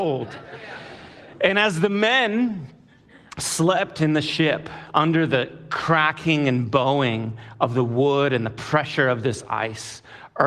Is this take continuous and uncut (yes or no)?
yes